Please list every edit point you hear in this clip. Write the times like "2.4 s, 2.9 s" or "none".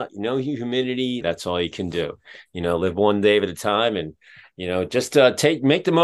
1.2 s